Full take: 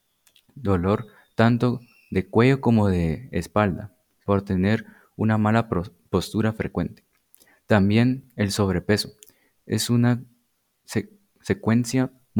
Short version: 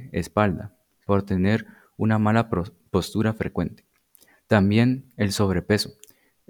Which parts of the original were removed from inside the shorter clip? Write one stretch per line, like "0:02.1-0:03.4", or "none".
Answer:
none